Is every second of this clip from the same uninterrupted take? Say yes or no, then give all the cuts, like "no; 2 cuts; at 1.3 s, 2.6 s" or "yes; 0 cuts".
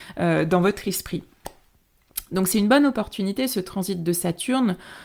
yes; 0 cuts